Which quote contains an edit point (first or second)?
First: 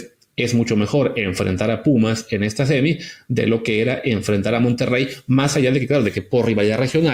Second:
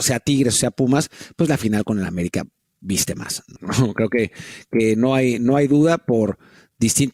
second